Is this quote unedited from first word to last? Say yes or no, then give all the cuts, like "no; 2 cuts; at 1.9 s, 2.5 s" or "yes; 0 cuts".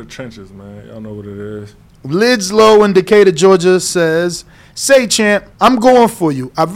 no; 1 cut; at 5.5 s